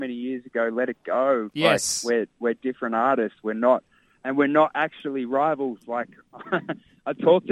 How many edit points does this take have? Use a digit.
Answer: 0